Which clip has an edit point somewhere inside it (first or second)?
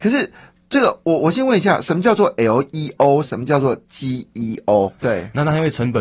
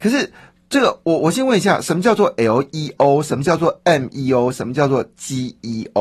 first